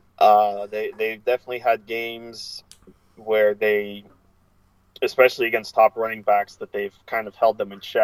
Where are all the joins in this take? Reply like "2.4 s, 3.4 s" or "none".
none